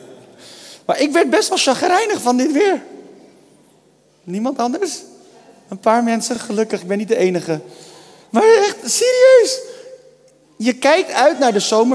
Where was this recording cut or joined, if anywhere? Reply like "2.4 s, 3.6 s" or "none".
none